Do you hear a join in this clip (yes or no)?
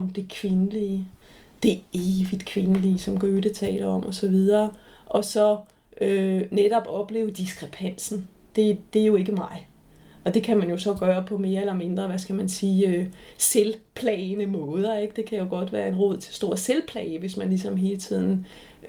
no